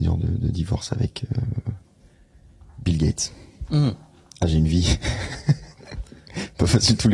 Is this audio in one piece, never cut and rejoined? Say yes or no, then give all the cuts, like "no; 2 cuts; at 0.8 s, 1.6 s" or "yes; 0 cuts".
yes; 0 cuts